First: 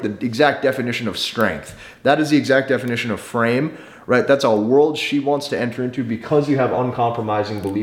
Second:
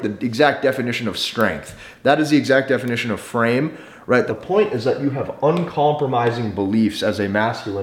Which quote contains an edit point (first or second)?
second